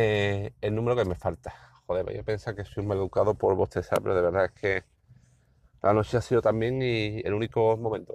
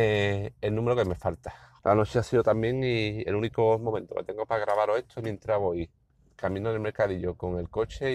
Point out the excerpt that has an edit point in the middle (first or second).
second